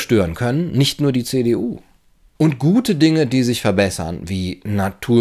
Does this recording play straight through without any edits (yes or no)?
no